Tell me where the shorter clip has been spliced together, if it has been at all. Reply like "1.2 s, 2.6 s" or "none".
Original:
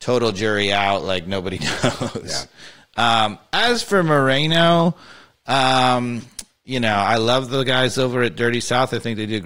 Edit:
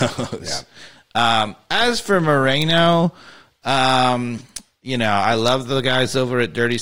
none